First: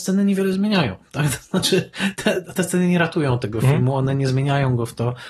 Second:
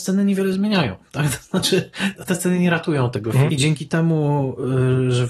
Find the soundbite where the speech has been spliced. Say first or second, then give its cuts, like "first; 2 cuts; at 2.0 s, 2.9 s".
second; 2 cuts; at 2.1 s, 3.5 s